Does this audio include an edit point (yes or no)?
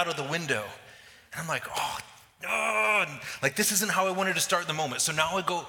no